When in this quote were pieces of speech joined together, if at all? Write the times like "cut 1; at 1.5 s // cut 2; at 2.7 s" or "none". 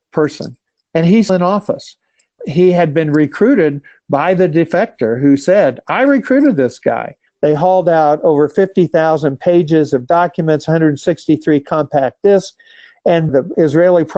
cut 1; at 1.3 s // cut 2; at 7.3 s